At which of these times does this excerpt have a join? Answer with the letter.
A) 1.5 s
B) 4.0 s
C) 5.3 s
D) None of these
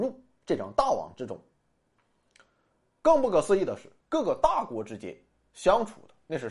B